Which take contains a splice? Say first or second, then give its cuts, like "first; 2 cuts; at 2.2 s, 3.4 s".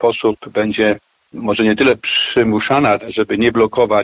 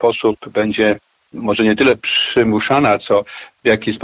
first; 1 cut; at 3.0 s